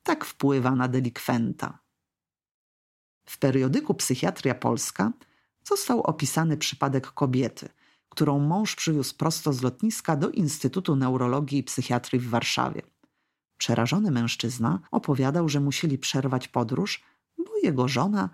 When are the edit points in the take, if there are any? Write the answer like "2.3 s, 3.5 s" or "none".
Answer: 13.4 s, 14.9 s